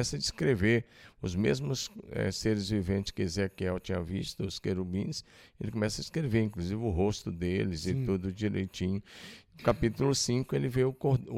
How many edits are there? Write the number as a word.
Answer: zero